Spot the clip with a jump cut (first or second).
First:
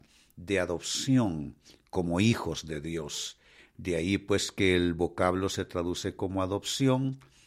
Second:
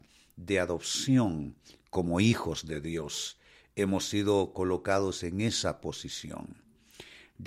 first